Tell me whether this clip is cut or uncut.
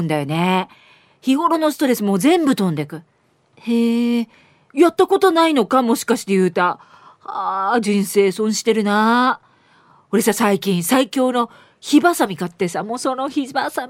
uncut